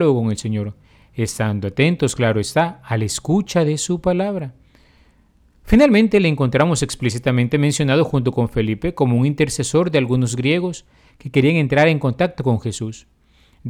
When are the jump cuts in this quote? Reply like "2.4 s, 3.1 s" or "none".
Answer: none